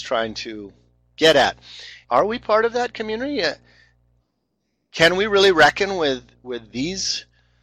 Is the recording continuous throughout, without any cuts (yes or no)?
no